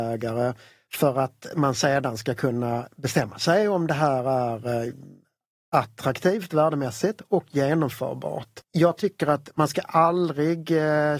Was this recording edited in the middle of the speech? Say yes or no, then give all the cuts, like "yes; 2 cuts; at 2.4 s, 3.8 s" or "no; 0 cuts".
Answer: yes; 1 cut; at 8.6 s